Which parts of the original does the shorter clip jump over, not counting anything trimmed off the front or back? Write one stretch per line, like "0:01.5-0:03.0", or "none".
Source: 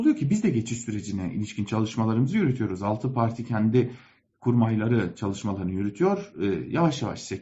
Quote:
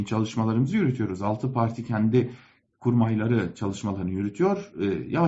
none